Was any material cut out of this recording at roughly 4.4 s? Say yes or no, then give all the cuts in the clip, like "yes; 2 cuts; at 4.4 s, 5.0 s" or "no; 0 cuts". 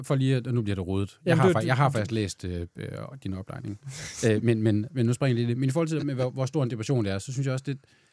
no; 0 cuts